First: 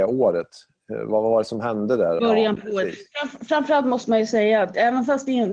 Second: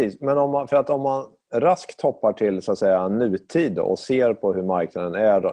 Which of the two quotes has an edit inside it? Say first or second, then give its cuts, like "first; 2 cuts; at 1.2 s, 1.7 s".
first; 1 cut; at 2.2 s